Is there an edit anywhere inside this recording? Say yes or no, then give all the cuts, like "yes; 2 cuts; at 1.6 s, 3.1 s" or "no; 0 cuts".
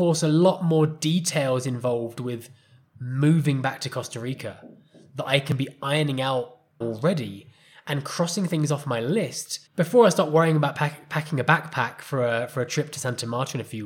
yes; 2 cuts; at 6.8 s, 9.7 s